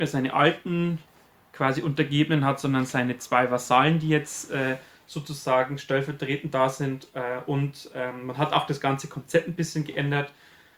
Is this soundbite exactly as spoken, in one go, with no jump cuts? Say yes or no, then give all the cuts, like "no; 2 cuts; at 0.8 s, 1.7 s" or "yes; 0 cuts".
yes; 0 cuts